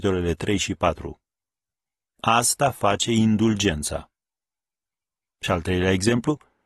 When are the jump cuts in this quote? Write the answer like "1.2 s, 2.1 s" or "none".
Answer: none